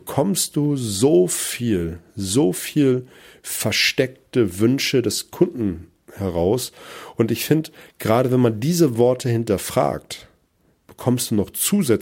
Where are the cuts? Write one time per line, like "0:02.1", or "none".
none